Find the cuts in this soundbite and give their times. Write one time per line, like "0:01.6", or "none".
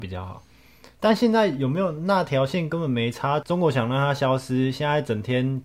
none